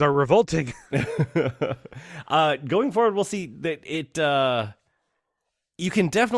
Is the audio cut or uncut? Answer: uncut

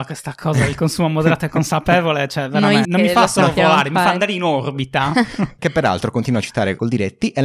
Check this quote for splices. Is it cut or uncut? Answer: cut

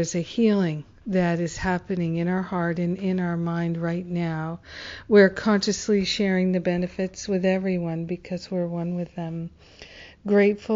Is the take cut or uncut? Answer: uncut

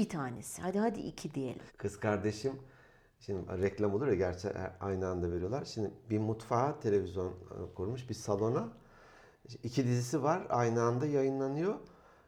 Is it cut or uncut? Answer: cut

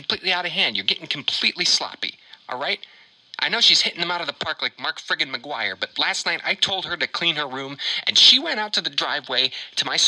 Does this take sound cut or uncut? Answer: uncut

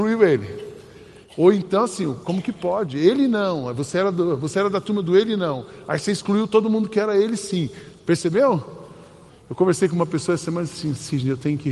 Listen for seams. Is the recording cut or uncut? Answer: cut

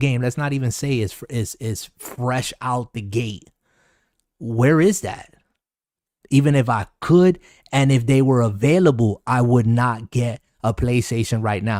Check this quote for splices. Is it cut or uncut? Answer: cut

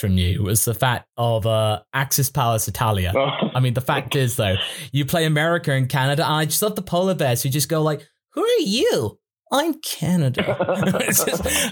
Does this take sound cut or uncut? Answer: uncut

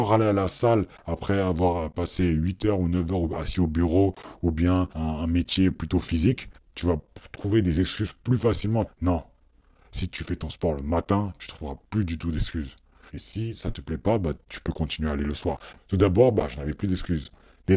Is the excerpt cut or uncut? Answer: cut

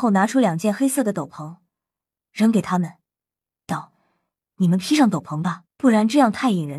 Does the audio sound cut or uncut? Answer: cut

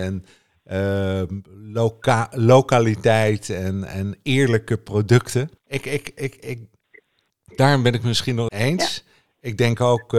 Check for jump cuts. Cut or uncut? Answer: cut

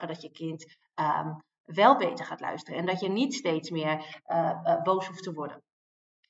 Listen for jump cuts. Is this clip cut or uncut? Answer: uncut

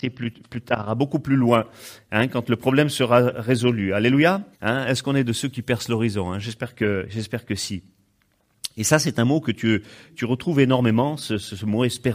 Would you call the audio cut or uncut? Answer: cut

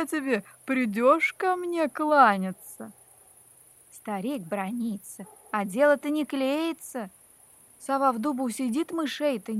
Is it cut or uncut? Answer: uncut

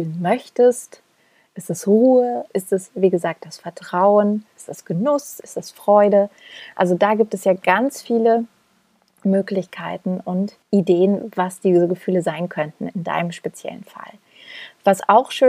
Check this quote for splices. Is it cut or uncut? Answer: cut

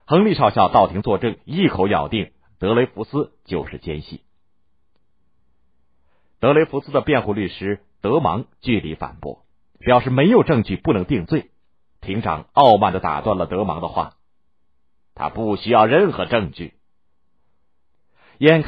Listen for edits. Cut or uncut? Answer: uncut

